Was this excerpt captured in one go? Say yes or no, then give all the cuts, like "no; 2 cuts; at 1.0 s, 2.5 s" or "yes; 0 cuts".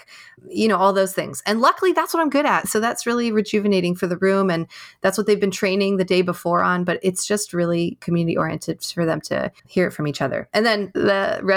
no; 1 cut; at 9.6 s